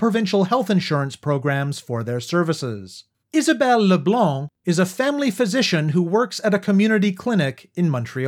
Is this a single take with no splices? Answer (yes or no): no